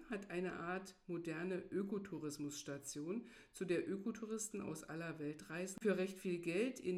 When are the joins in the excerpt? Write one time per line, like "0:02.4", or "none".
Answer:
0:05.8